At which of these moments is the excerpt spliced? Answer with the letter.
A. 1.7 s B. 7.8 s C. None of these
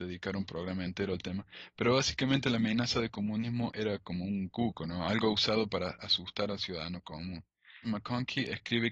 B